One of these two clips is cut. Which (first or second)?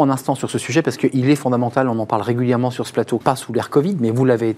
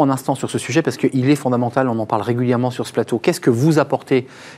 first